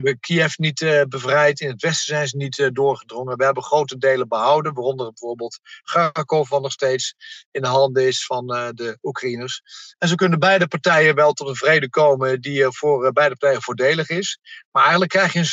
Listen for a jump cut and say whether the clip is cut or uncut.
uncut